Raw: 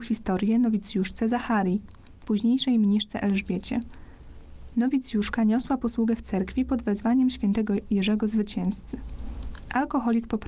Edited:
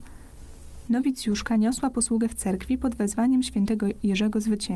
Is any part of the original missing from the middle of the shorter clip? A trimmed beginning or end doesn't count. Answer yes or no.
no